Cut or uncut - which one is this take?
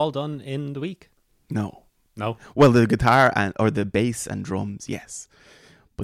uncut